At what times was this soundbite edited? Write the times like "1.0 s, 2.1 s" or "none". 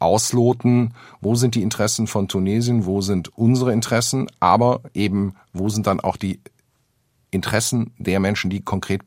none